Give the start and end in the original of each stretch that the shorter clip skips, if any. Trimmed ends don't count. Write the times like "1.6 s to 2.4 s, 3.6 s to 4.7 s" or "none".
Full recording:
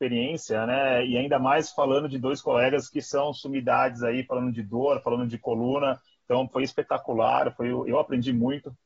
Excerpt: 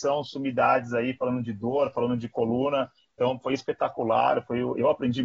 none